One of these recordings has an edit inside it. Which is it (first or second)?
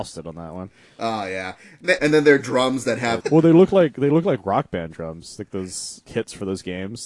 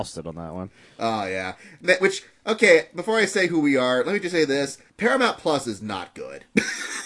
first